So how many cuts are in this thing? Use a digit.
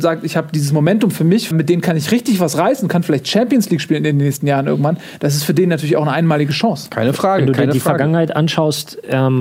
1